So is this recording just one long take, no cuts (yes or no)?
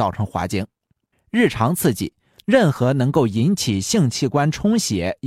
no